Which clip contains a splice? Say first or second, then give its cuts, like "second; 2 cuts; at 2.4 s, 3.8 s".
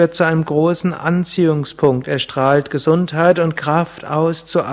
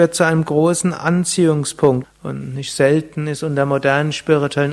second; 1 cut; at 2.0 s